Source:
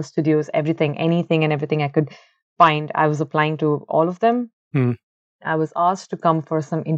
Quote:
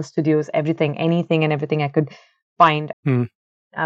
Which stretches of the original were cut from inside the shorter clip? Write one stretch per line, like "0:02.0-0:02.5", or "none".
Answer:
0:02.9-0:04.6

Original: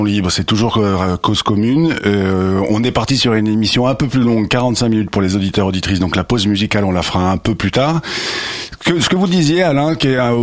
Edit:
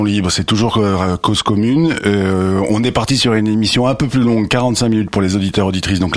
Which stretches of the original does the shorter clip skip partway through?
none

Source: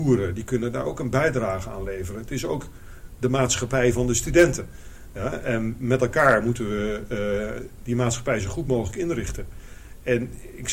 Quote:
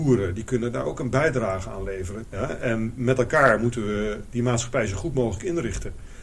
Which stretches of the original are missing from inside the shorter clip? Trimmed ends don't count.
0:02.2-0:05.1
0:07.1-0:07.8

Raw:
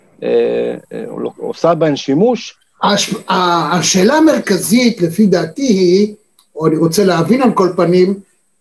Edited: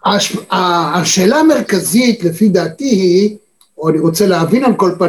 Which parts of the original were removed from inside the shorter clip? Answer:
none

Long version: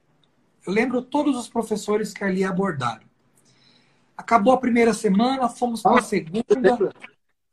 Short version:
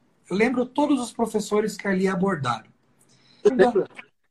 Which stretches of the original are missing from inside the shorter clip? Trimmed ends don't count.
0:03.8-0:06.5

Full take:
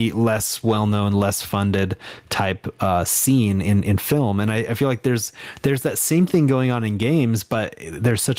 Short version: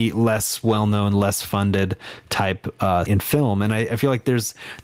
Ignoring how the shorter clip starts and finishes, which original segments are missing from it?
0:03.1-0:03.8

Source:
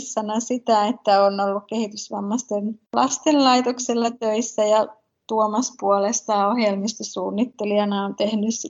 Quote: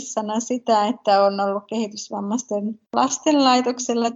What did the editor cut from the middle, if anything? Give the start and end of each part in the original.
none

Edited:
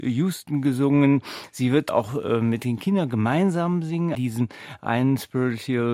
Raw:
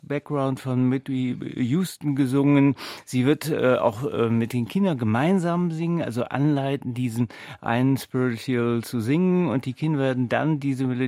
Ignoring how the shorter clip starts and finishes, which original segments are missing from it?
0:03.4-0:03.8
0:06.0-0:06.9

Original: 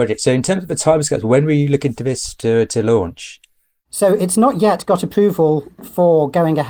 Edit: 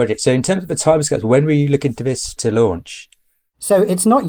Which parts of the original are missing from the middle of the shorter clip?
0:02.4-0:02.7

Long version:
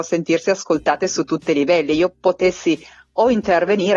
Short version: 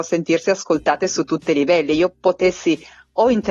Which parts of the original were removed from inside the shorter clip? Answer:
none

